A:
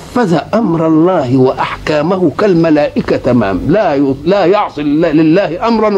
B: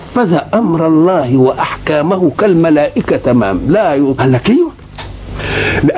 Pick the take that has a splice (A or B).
B